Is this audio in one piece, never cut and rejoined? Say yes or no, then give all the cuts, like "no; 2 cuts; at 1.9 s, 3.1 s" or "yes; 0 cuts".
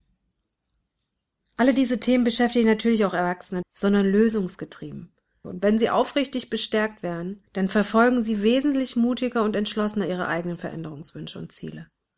no; 3 cuts; at 3.6 s, 5.4 s, 7.5 s